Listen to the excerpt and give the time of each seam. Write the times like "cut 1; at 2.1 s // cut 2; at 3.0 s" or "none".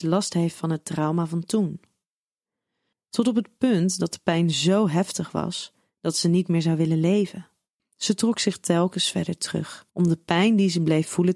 cut 1; at 2.9 s // cut 2; at 7.8 s // cut 3; at 9.9 s